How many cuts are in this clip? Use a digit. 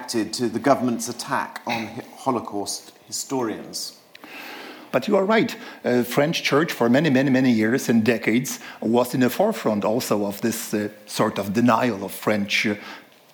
1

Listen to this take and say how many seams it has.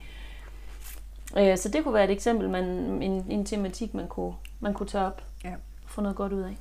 0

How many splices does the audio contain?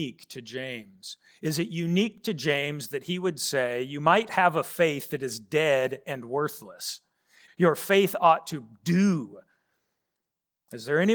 1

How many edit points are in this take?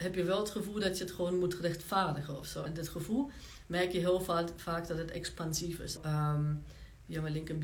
2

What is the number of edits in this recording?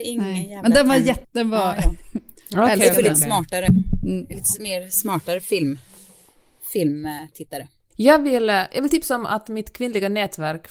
1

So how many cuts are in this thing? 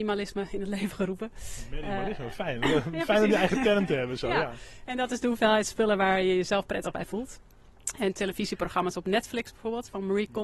0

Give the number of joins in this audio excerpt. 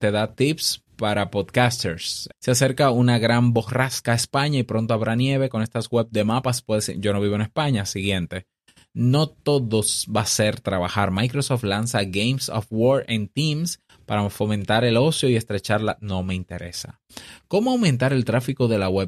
1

